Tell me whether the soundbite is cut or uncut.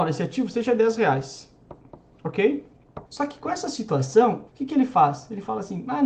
cut